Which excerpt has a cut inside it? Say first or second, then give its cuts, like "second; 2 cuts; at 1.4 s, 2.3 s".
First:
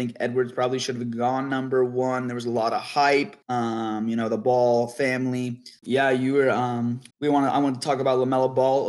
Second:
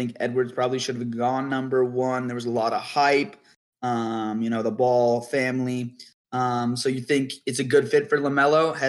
first; 3 cuts; at 3.4 s, 5.8 s, 7.1 s